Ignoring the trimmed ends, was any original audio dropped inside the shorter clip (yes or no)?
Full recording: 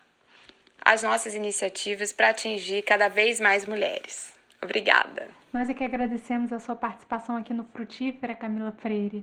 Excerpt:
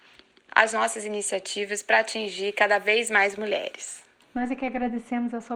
yes